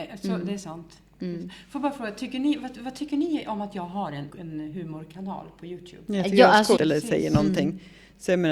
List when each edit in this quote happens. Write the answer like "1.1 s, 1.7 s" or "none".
4.3 s, 6.8 s